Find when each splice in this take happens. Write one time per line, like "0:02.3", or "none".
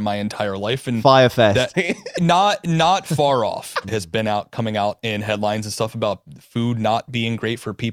0:01.7
0:03.8